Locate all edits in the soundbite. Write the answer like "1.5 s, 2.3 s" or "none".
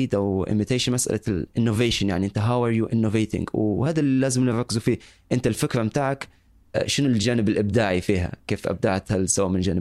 none